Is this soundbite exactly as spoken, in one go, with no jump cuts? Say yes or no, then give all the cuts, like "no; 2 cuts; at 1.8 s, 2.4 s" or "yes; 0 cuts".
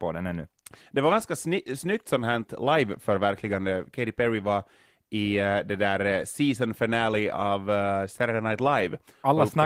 yes; 0 cuts